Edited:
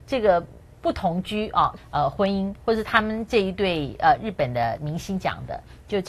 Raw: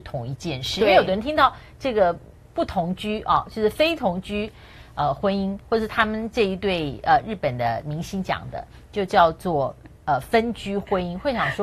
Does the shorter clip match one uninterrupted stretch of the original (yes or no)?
no